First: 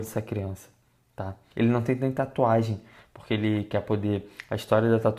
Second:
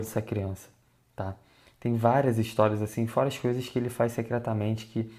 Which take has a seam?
first; 1 cut; at 1.5 s

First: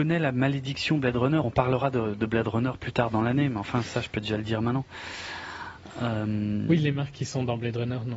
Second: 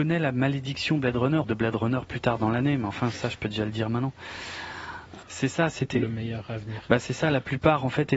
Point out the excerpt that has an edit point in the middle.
second; 2 cuts; at 1.4 s, 5.2 s

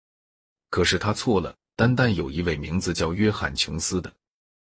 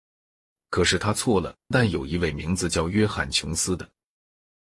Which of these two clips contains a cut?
second; 1 cut; at 1.7 s

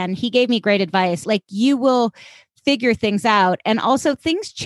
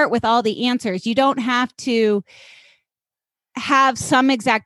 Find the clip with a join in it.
first; 1 cut; at 1.2 s

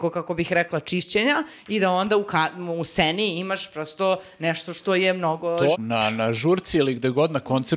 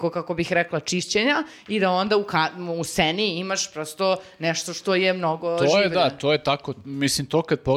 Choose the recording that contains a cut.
first; 1 cut; at 5.7 s

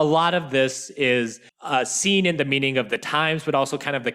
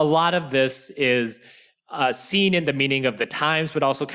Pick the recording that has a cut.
first; 1 cut; at 1.5 s

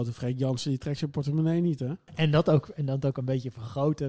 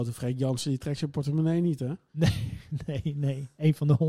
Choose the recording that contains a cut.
first; 1 cut; at 2.1 s

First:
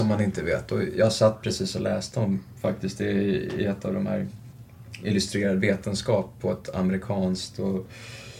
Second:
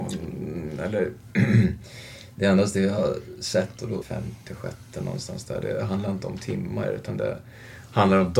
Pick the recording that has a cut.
second; 1 cut; at 4.0 s

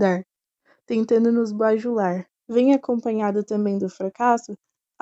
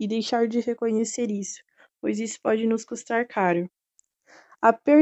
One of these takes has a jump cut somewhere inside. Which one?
first; 1 cut; at 2.3 s

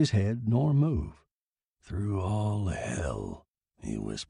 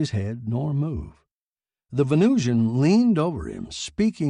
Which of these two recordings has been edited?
first; 1 cut; at 1.6 s

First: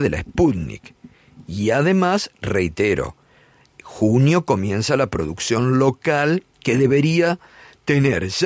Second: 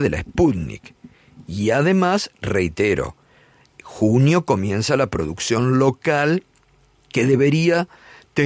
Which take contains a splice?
first; 1 cut; at 6.5 s

